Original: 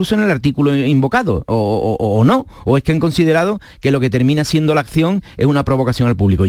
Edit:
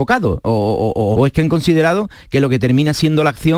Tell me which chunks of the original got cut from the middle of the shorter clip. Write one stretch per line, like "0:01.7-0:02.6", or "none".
0:02.2-0:02.6